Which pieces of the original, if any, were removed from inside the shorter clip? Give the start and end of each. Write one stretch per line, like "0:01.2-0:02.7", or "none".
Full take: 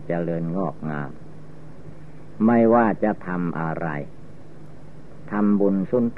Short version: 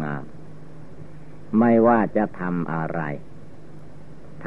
none